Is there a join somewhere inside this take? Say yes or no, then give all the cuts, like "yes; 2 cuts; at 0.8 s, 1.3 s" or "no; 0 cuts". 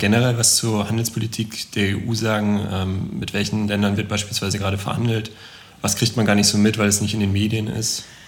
no; 0 cuts